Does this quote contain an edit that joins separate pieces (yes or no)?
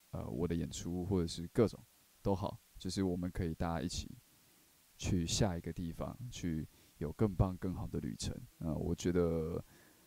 yes